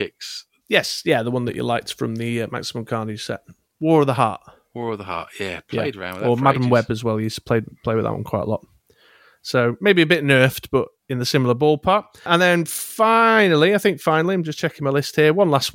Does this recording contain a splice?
no; 0 cuts

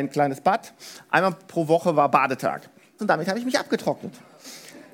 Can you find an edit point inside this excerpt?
yes; 1 cut; at 3.0 s

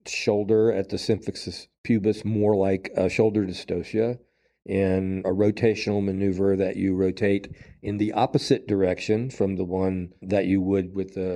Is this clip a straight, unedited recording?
no; 2 cuts; at 5.2 s, 10.2 s

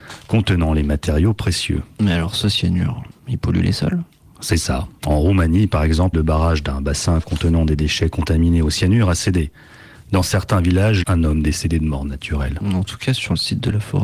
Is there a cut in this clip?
yes; 3 cuts; at 6.1 s, 9.9 s, 11.0 s

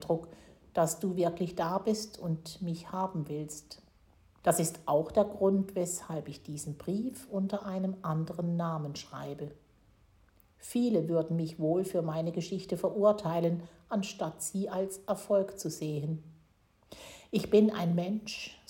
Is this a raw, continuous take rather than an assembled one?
no; 1 cut; at 4.4 s

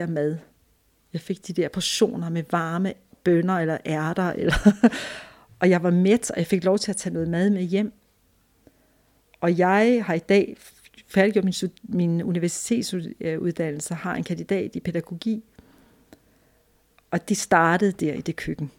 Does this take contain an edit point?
no; 0 cuts

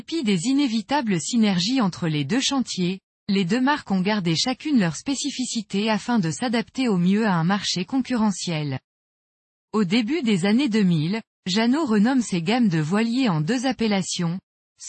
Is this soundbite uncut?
yes; 0 cuts

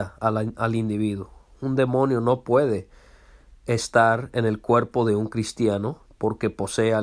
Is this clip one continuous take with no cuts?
yes; 0 cuts

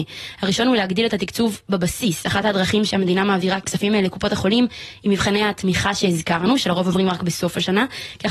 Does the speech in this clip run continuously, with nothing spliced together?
no; 1 cut; at 3.6 s

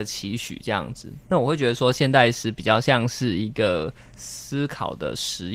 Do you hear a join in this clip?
yes; 1 cut; at 1.2 s

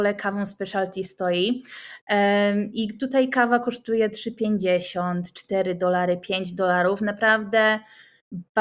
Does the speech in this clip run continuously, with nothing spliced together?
yes; 0 cuts

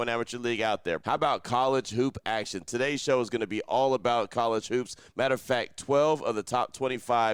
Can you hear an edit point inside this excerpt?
yes; 1 cut; at 1.0 s

